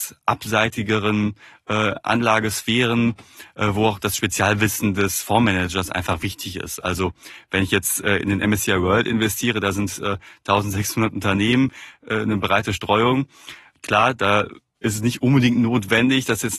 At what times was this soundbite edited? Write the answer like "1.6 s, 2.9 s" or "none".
none